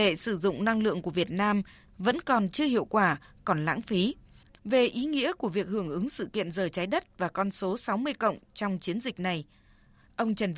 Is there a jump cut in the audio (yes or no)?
yes